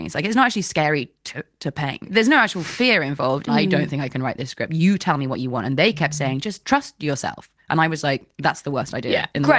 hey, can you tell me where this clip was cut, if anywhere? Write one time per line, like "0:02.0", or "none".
0:03.5
0:04.7